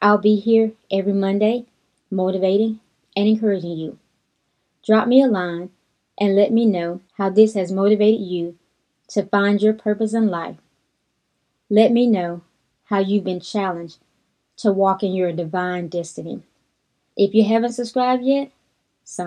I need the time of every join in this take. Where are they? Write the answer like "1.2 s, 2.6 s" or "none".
7.1 s, 17.1 s